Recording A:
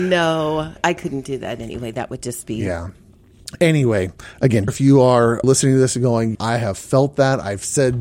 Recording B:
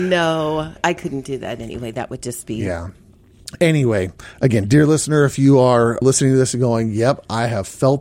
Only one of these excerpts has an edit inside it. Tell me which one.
A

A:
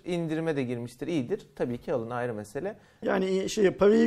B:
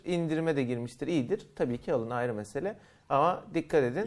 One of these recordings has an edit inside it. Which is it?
A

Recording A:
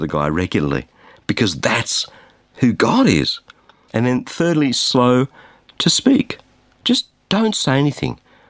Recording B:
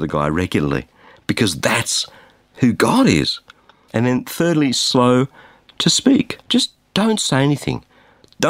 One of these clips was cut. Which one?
B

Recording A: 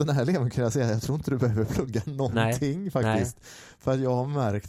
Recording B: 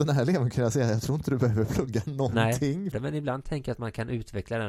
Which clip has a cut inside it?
B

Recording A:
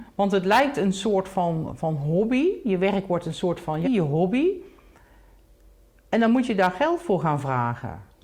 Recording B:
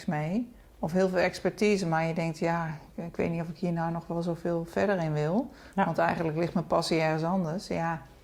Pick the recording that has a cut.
A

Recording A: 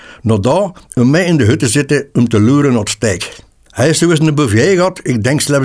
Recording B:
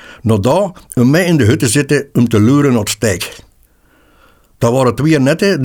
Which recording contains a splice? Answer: A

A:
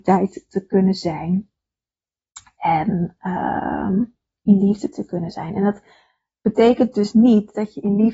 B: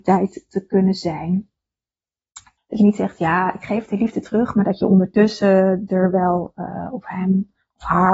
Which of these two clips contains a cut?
B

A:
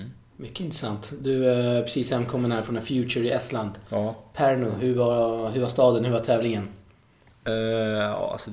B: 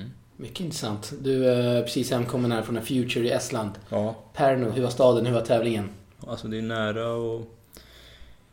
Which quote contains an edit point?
B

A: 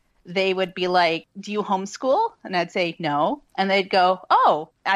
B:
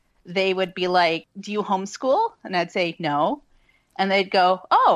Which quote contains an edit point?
A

